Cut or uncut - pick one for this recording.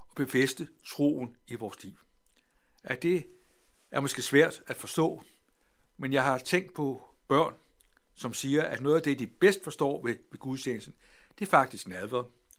uncut